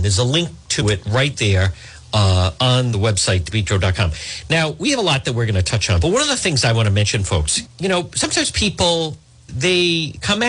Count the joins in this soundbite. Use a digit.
2